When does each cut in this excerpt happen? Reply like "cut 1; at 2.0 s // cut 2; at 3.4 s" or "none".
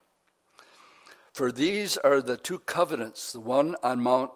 none